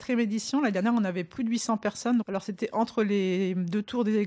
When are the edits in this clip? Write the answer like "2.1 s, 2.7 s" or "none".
2.2 s